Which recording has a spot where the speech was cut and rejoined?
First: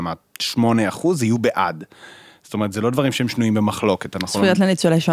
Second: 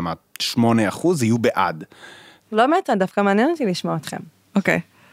second; 1 cut; at 2.4 s

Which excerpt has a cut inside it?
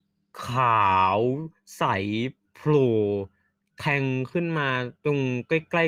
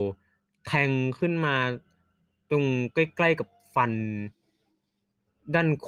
first; 1 cut; at 5.0 s

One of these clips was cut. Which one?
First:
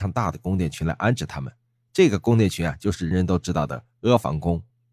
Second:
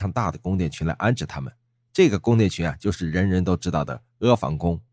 first; 1 cut; at 3.1 s

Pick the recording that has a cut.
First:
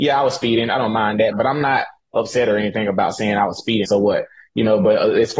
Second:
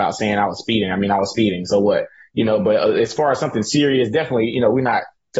first; 2 cuts; at 1.3 s, 3.8 s

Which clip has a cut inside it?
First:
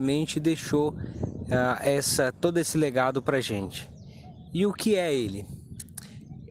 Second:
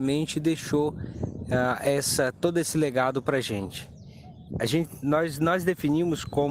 second; 1 cut; at 4.5 s

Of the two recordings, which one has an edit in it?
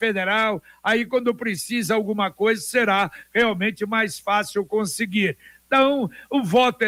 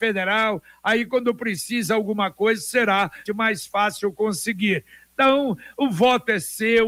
second; 1 cut; at 3.3 s

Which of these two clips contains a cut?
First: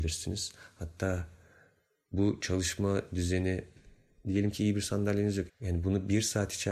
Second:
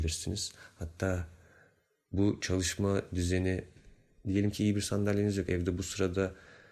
first; 1 cut; at 5.5 s

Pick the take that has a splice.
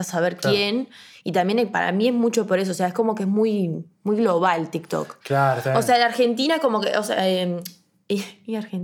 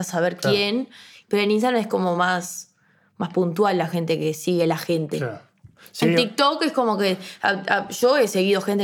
second; 1 cut; at 1.2 s

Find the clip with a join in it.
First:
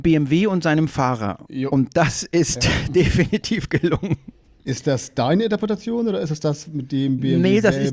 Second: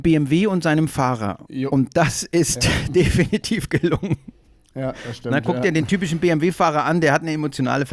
first; 1 cut; at 4.6 s

